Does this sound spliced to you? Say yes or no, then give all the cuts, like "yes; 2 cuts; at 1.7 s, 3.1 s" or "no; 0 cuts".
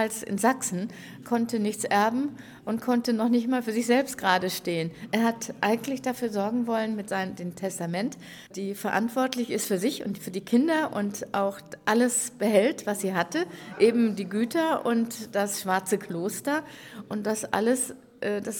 yes; 1 cut; at 8.5 s